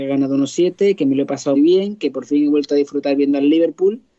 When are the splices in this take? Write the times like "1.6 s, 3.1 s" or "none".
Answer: 1.5 s

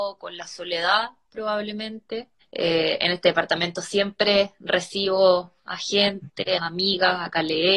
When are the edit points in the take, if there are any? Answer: 2.4 s, 6.6 s

